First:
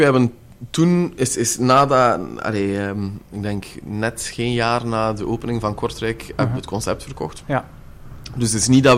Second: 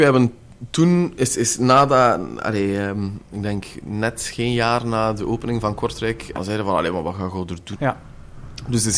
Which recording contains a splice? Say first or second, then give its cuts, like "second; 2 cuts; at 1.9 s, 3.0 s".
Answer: second; 2 cuts; at 6.4 s, 7.8 s